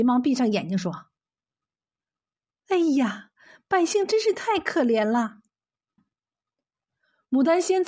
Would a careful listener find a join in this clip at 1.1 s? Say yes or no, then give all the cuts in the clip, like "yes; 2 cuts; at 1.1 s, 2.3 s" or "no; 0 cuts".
no; 1 cut; at 6.0 s